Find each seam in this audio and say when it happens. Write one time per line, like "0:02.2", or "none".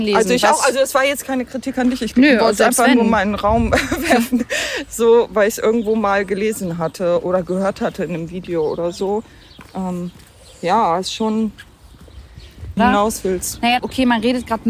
0:12.8
0:13.8